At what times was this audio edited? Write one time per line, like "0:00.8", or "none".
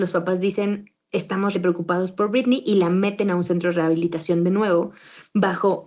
0:01.5